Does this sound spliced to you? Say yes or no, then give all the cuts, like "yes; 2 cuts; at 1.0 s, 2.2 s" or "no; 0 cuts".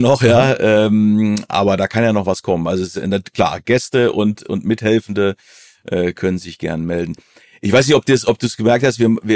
no; 0 cuts